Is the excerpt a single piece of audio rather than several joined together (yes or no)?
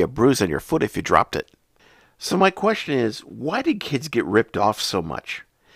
yes